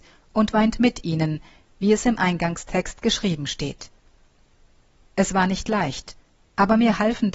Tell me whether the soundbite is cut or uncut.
cut